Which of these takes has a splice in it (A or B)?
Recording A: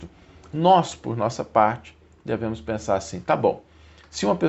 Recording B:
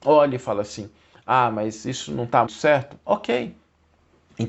B